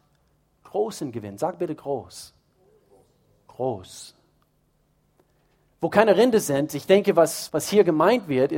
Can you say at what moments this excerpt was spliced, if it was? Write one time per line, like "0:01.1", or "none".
0:07.5